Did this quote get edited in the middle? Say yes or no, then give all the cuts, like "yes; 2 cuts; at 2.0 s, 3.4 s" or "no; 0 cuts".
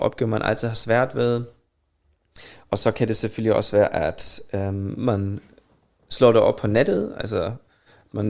no; 0 cuts